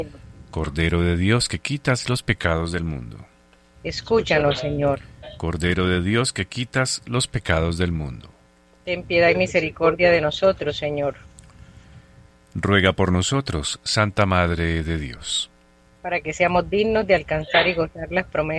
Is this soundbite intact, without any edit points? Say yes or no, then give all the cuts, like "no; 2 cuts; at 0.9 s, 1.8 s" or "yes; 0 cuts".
yes; 0 cuts